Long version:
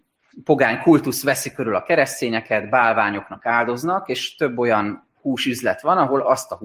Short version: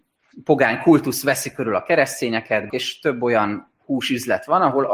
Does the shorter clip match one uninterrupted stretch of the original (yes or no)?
no